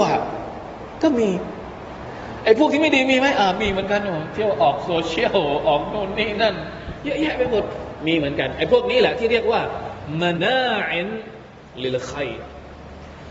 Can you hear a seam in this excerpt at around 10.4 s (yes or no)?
yes